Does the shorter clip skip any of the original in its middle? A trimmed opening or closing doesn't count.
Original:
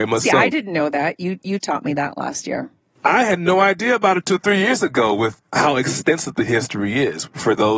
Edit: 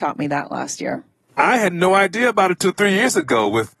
no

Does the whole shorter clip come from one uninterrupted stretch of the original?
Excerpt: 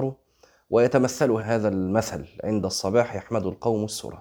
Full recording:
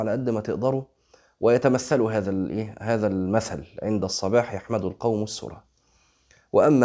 no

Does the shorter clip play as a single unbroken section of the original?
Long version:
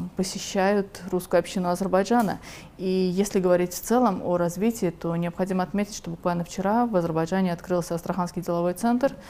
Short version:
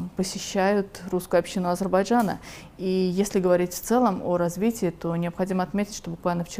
yes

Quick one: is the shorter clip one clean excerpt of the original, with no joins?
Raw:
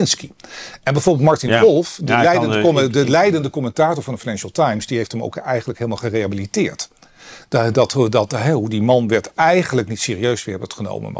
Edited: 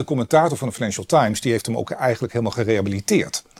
yes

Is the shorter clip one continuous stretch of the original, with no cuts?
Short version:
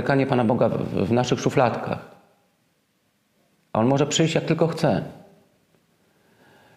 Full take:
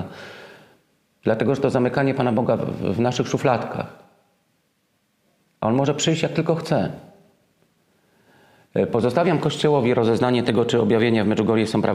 yes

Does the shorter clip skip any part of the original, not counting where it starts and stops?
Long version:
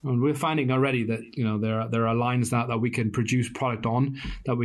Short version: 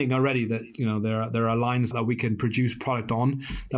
yes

